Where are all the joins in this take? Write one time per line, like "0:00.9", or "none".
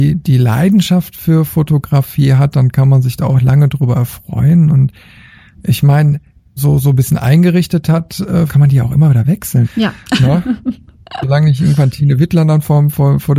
0:06.6
0:08.5
0:09.6